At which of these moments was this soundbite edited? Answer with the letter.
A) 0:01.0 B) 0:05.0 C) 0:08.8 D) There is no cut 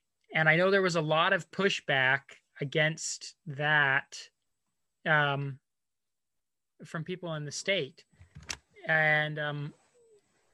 D